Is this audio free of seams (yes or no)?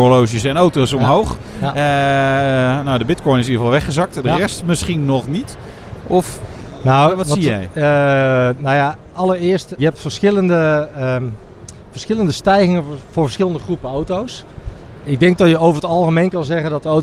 no